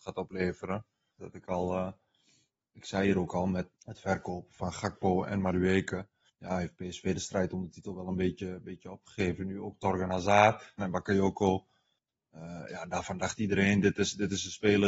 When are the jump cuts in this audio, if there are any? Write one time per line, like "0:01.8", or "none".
0:01.2
0:10.8